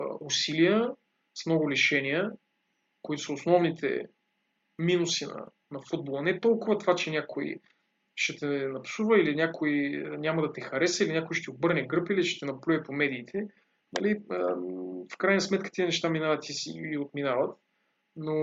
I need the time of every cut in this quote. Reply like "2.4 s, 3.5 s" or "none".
none